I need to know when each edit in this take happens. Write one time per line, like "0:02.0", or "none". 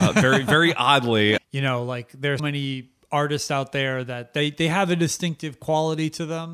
0:01.4
0:02.4